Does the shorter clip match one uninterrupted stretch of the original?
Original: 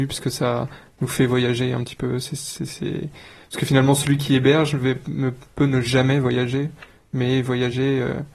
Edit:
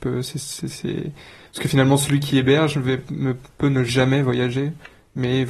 yes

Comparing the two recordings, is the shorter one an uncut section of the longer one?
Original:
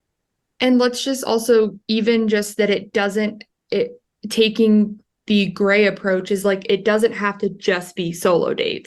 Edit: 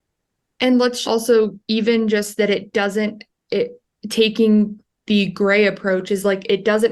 no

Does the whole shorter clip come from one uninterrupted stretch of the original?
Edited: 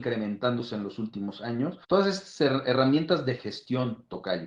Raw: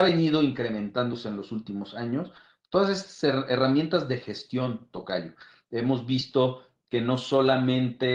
no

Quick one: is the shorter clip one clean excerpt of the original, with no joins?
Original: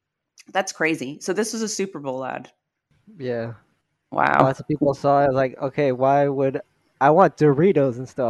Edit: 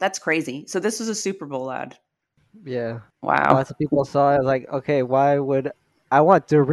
no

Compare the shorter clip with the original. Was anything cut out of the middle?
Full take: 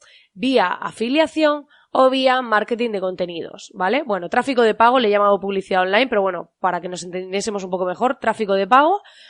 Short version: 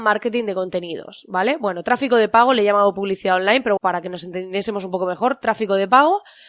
yes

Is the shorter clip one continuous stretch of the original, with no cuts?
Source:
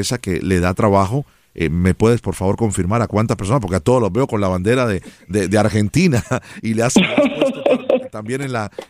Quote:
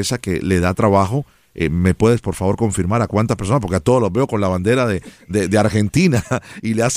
yes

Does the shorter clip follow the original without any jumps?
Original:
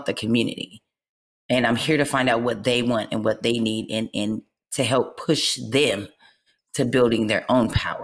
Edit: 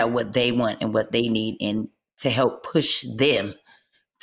no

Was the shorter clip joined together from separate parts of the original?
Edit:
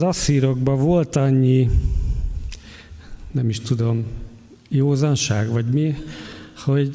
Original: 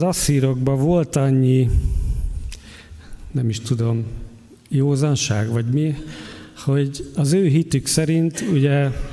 no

